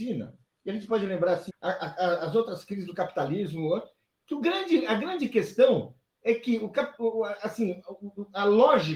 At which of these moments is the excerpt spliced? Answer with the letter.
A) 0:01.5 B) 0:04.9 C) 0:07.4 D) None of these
A